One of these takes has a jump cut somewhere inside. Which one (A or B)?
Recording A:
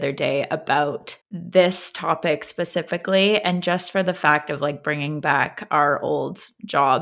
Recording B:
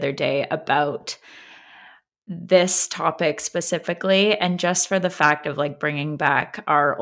A